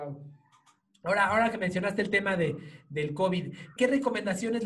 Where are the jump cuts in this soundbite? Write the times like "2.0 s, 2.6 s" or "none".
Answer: 3.8 s

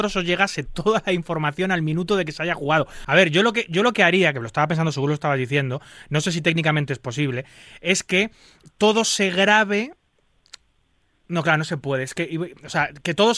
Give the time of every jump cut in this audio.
3.0 s

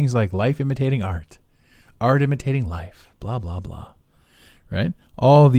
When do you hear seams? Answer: none

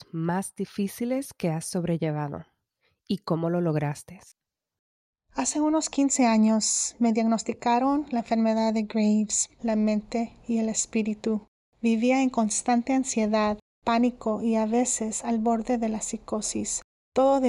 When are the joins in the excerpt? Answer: 9.6 s

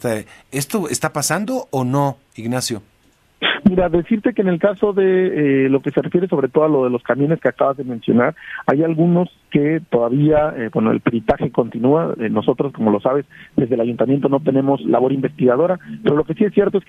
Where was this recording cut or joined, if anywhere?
none

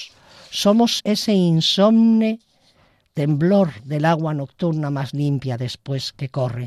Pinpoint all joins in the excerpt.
1.0 s

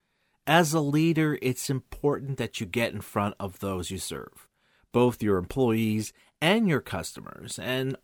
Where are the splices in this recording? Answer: none

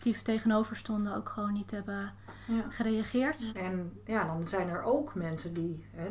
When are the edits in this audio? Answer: 3.5 s

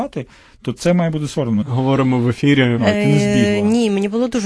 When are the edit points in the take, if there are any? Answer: 1.6 s, 2.8 s

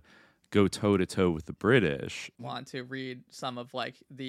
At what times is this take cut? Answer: 2.4 s

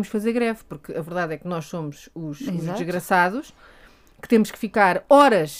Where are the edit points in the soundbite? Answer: none

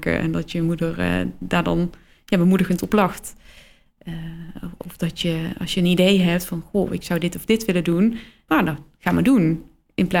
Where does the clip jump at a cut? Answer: 8.5 s

